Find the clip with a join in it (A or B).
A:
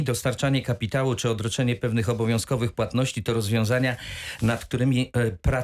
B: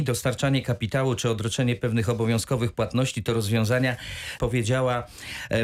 B